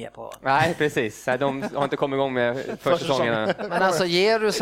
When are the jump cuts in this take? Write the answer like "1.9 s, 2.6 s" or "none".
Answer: none